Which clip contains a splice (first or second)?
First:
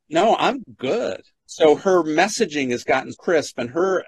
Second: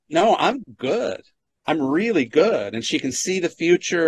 first